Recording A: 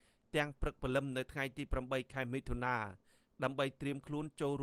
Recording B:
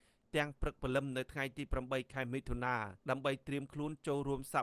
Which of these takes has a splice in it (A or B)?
B